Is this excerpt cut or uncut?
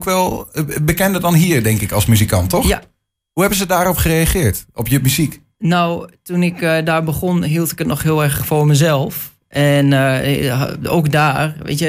uncut